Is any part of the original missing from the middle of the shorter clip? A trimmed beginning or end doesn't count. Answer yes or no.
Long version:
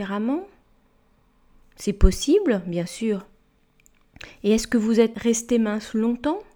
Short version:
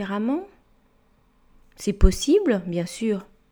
no